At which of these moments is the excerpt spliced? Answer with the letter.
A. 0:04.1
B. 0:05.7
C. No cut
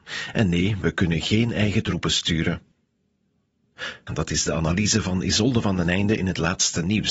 A